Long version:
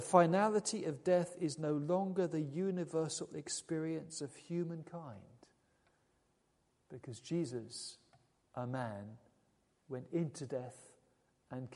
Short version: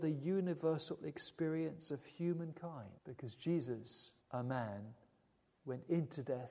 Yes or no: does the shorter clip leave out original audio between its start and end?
yes